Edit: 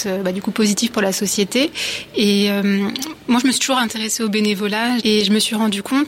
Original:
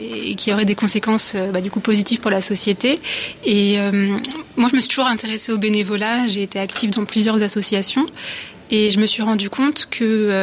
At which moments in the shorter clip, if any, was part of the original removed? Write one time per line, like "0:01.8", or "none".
0:05.0